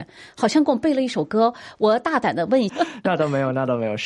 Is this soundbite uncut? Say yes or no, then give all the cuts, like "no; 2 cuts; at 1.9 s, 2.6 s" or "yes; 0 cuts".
no; 1 cut; at 2.7 s